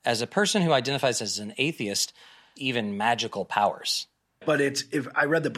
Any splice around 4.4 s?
yes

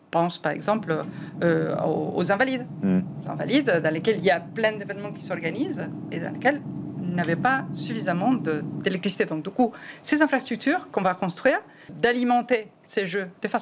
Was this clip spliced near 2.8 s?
no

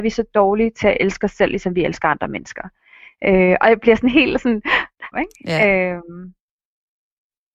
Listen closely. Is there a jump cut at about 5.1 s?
yes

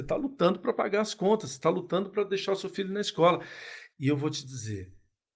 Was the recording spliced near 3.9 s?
yes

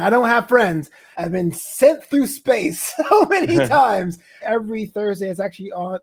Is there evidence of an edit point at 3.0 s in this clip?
no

